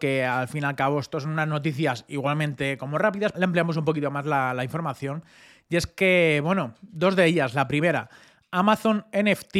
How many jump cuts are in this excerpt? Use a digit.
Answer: 1